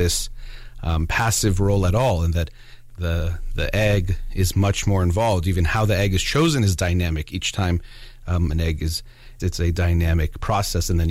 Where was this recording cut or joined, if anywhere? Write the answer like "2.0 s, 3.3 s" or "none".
9.4 s